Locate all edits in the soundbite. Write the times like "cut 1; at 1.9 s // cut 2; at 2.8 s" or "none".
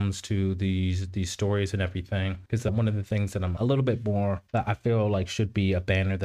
cut 1; at 3.6 s